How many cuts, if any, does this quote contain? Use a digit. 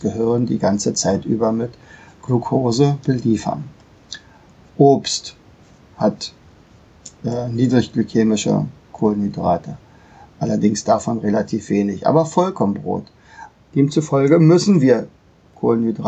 1